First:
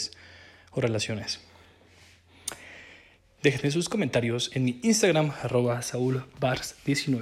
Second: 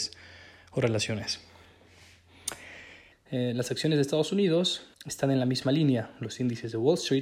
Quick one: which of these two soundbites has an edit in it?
second; 2 cuts; at 3.1 s, 4.9 s

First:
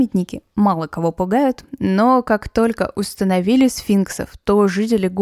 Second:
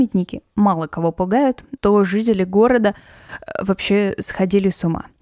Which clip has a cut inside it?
second; 1 cut; at 1.8 s

